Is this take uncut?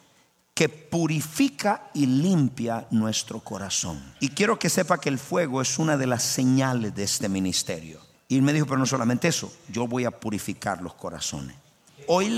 no; 2 cuts; at 4.2 s, 8.1 s

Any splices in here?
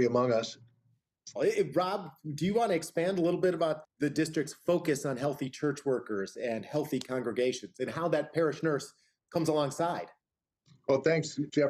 yes; 2 cuts; at 1.4 s, 3.8 s

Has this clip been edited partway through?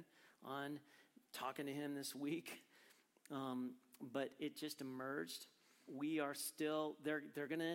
no; 0 cuts

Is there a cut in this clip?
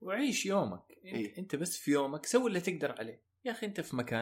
no; 0 cuts

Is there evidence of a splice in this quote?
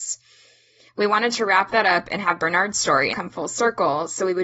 yes; 1 cut; at 3.1 s

